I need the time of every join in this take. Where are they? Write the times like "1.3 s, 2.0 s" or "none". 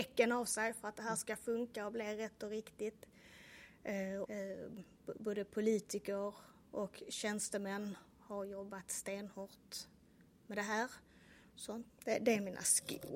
4.3 s, 11.9 s